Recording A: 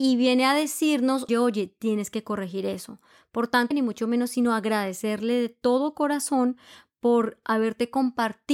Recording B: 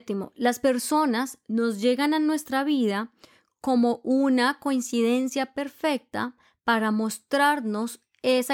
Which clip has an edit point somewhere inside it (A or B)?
A